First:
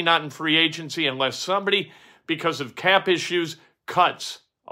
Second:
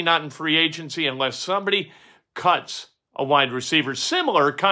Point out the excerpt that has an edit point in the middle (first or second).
second